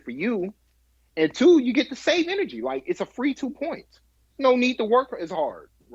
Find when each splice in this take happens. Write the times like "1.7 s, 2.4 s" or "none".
none

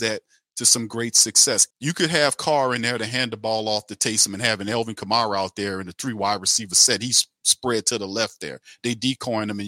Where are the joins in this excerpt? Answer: 1.7 s

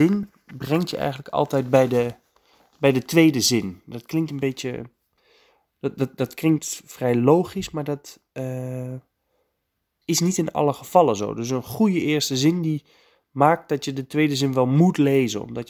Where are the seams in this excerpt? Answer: none

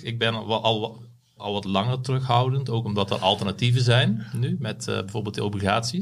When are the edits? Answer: 1.4 s

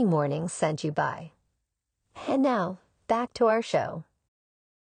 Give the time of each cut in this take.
none

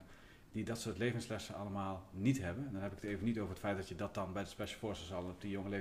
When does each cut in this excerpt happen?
none

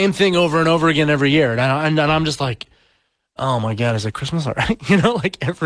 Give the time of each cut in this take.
none

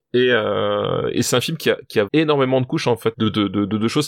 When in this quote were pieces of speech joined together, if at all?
2.1 s, 3.1 s

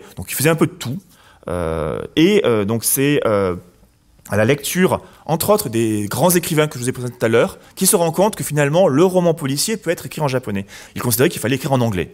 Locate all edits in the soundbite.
10.9 s

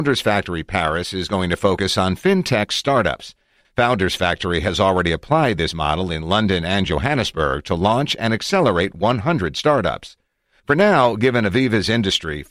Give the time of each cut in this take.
3.6 s, 10.6 s

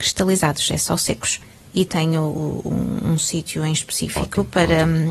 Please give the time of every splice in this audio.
1.9 s

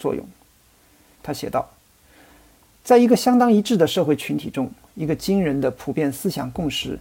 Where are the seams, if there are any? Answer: 1.1 s

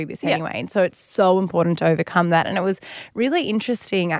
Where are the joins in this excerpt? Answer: none

